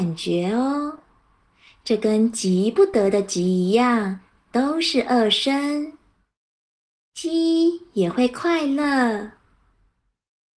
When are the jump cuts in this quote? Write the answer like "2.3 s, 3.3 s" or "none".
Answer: 4.4 s, 7.0 s